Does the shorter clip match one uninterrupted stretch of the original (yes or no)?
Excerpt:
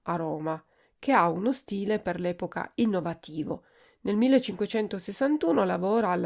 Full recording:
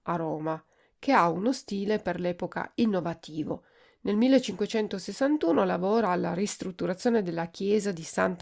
yes